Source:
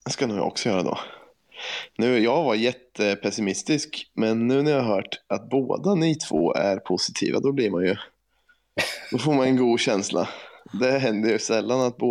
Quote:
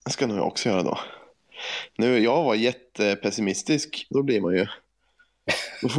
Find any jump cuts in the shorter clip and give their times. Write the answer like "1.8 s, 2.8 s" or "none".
4.1 s